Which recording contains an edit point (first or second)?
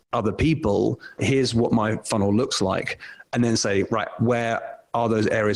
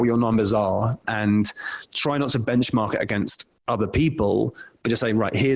first